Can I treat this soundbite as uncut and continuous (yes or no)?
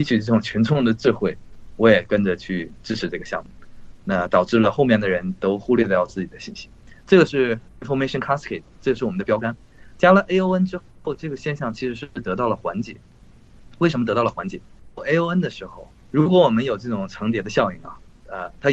yes